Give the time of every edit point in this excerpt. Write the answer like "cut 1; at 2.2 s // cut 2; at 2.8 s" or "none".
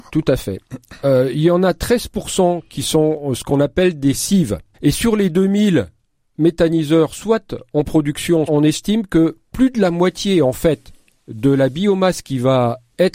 cut 1; at 4.7 s // cut 2; at 8.5 s